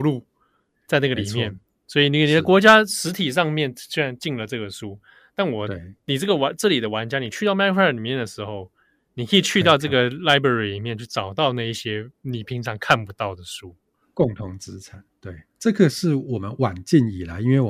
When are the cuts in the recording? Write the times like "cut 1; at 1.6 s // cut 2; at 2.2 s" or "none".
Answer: none